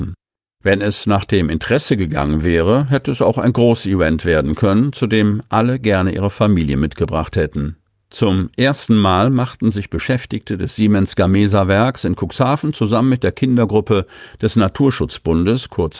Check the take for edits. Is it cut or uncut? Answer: cut